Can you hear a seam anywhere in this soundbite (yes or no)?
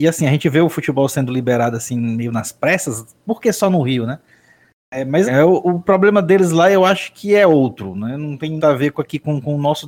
yes